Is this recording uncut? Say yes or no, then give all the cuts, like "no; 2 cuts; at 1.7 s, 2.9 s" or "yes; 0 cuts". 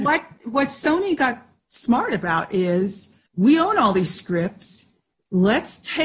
yes; 0 cuts